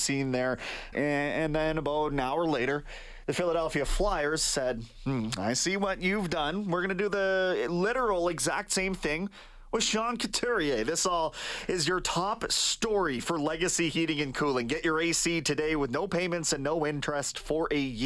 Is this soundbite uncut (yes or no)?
no